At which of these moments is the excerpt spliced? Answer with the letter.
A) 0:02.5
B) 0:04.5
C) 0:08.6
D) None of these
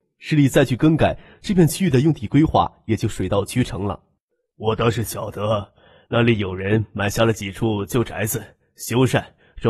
B